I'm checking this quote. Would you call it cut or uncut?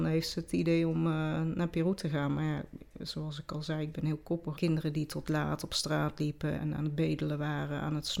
cut